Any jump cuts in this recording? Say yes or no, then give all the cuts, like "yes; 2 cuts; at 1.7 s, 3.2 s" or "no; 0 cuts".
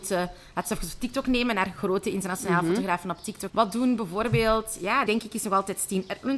yes; 2 cuts; at 3.5 s, 5.1 s